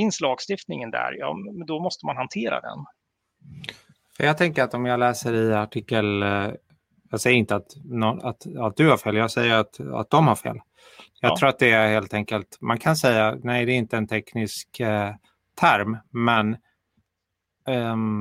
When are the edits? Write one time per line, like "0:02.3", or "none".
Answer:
0:08.2